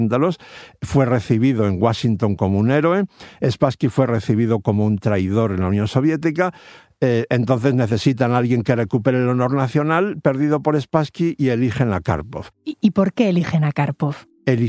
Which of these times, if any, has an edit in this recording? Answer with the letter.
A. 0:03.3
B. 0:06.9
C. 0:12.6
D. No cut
D